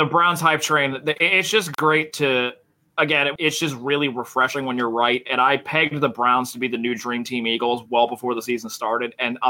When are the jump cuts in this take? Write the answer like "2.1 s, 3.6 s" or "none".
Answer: 3.4 s